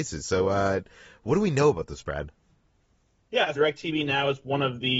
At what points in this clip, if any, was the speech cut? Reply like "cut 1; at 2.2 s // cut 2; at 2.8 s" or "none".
cut 1; at 3.5 s